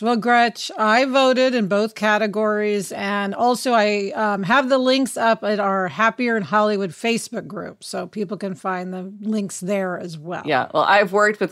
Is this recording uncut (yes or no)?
yes